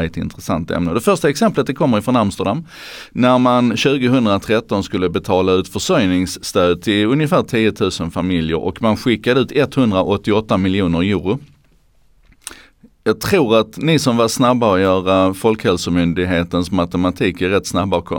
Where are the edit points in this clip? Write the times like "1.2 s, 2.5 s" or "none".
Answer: none